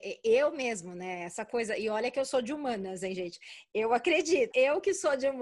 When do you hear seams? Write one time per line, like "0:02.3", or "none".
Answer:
0:04.5